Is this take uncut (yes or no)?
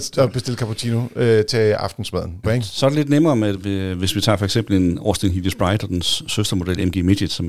no